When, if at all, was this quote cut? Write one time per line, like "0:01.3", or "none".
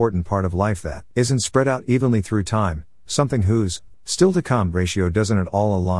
0:01.1
0:03.9